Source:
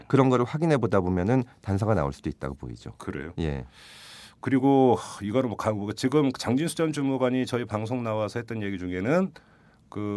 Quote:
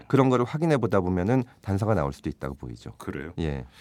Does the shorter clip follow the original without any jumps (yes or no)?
yes